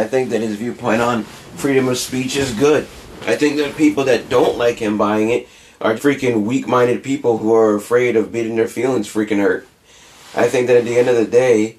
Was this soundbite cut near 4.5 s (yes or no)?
no